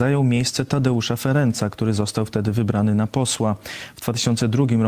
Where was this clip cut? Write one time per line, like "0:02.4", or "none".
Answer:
none